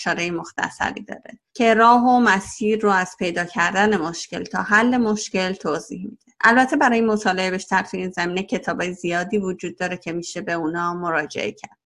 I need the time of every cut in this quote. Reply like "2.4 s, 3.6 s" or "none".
1.5 s, 6.4 s